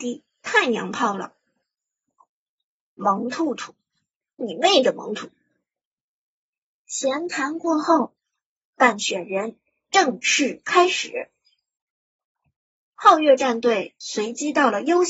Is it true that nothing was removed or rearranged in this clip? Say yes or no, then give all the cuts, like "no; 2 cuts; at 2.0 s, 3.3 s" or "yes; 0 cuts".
no; 1 cut; at 5.1 s